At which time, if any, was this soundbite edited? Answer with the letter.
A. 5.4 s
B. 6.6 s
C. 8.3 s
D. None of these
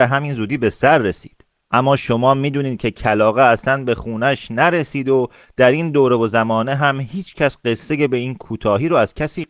D